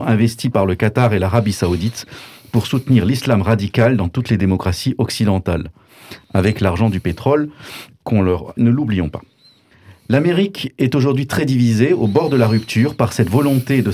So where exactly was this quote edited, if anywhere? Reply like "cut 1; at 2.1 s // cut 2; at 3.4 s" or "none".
cut 1; at 8.6 s